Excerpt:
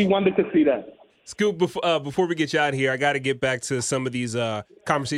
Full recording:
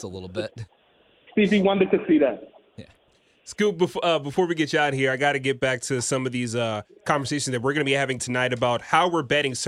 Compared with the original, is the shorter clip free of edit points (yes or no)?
no